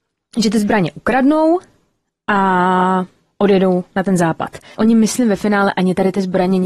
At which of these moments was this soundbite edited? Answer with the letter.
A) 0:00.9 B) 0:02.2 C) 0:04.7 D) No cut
C